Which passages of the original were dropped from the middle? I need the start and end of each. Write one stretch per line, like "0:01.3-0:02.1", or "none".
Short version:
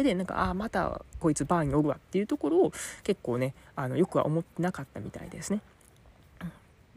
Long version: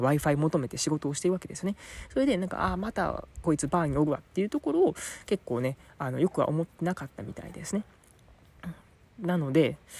none